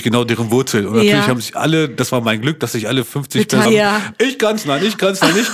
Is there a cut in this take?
yes; 1 cut; at 3.6 s

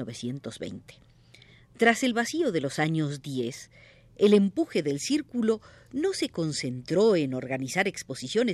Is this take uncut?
yes; 0 cuts

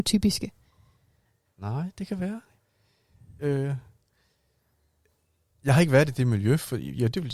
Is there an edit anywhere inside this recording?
no; 0 cuts

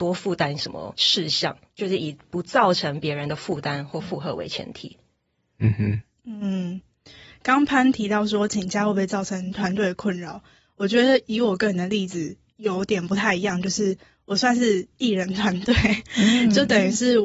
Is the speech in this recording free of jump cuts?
yes; 0 cuts

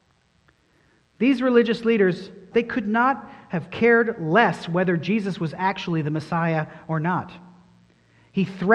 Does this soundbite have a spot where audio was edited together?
yes; 1 cut; at 2.5 s

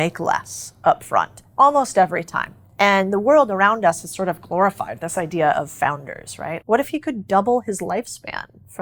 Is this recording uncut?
no; 1 cut; at 6.6 s

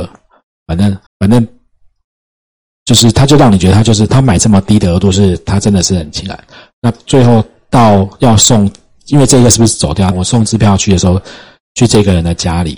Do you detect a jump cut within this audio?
yes; 2 cuts; at 1.1 s, 10.1 s

